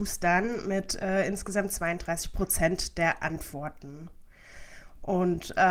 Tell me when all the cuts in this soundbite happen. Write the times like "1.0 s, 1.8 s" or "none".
none